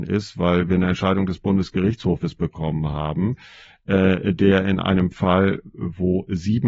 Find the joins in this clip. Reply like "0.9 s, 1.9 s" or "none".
none